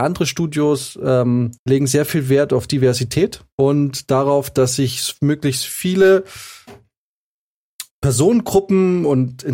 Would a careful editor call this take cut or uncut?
cut